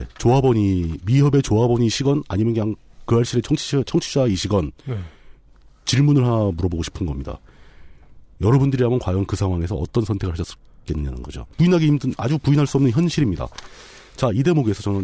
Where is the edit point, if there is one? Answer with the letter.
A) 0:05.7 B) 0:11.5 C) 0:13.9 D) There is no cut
B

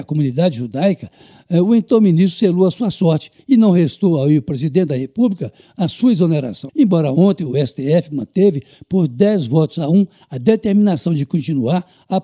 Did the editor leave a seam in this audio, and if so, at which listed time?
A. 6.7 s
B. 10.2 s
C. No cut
A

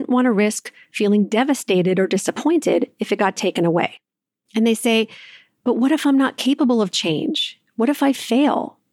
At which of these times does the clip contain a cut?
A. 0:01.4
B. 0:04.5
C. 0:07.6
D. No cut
B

